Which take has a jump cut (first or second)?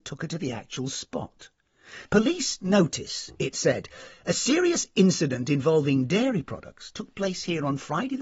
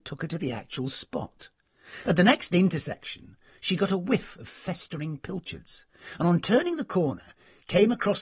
first